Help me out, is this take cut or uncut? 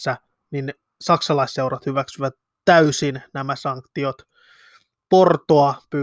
uncut